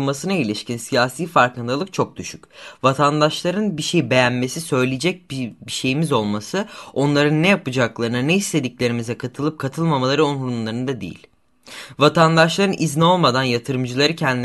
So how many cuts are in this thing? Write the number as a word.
zero